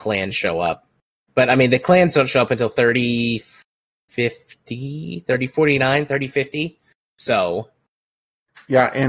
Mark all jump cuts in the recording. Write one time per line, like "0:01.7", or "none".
none